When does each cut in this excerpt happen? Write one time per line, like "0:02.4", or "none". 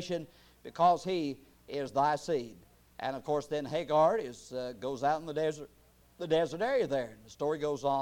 none